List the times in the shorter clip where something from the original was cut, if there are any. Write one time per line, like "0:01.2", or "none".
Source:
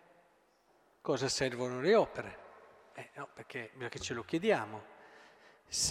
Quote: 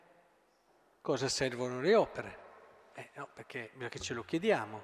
none